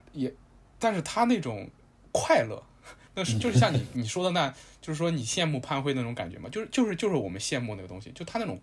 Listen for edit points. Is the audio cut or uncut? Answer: uncut